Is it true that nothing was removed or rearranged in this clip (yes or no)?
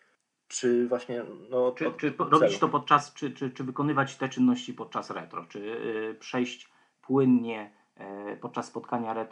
yes